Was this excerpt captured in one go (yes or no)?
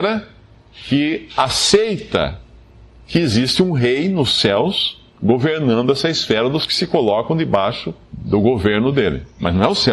no